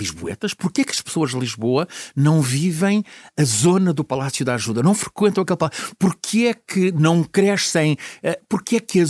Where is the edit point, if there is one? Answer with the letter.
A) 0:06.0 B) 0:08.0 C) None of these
C